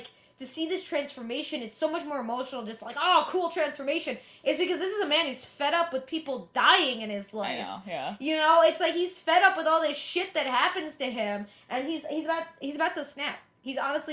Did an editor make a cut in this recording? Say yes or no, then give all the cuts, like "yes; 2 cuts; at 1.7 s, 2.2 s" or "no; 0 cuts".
no; 0 cuts